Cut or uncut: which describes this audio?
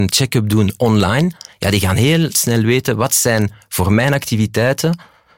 uncut